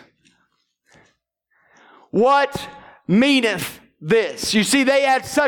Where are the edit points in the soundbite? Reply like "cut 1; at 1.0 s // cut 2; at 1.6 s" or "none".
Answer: none